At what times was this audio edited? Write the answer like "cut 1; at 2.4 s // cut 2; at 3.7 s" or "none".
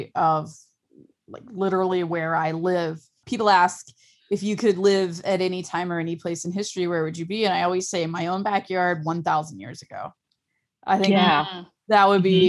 none